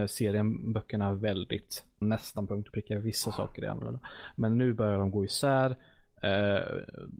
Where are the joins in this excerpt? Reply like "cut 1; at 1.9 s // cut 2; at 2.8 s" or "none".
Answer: cut 1; at 2.0 s